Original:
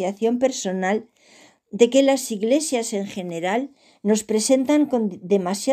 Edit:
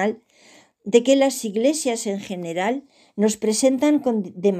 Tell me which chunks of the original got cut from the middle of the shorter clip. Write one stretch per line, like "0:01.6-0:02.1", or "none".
none